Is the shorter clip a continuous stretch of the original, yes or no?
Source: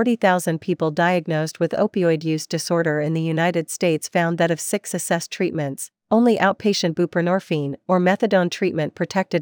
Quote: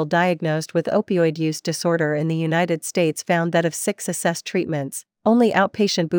yes